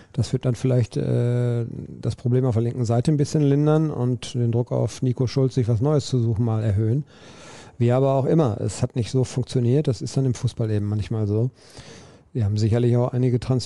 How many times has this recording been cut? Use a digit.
0